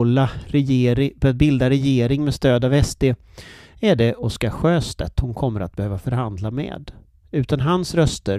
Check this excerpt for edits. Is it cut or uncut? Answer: uncut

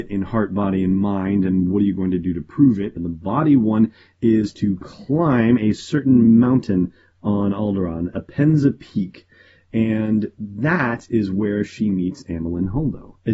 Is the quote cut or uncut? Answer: cut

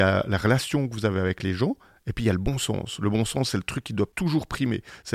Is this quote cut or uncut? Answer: uncut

